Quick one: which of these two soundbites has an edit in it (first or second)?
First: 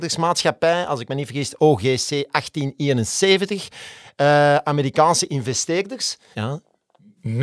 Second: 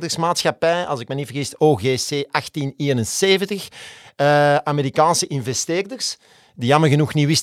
first